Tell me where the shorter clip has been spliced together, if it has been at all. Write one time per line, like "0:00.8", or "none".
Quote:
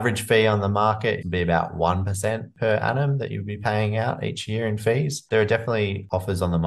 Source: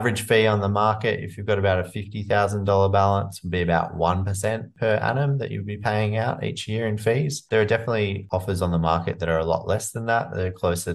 0:01.2

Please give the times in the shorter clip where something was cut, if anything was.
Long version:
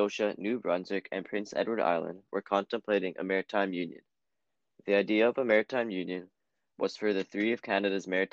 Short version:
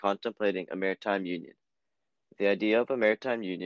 none

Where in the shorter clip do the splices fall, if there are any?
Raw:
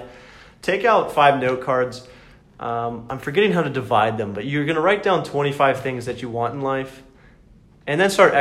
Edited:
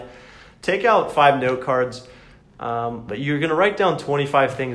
0:03.1

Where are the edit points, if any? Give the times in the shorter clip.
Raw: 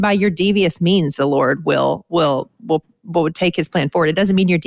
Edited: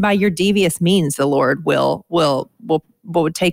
none

